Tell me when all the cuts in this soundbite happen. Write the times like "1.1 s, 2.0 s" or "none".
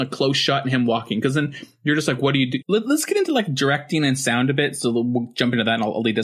2.6 s